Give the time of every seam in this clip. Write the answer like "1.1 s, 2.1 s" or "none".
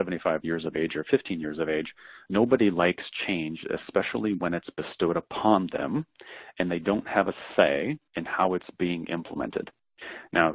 none